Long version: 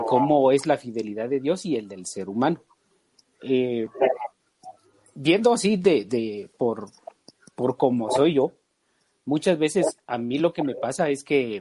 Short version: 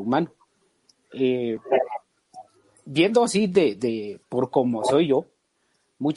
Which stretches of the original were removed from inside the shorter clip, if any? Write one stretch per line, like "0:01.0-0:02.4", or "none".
0:06.5-0:07.5